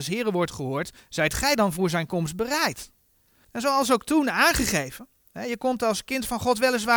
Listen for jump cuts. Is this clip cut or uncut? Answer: uncut